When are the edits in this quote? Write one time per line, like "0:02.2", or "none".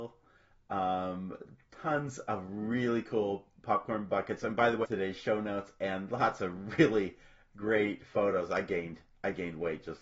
0:04.8